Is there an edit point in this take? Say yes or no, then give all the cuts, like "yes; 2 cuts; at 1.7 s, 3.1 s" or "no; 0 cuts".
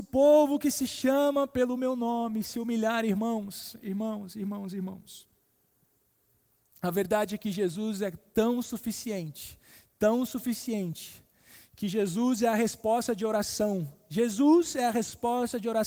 no; 0 cuts